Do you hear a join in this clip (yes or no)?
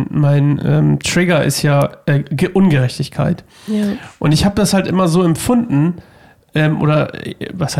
no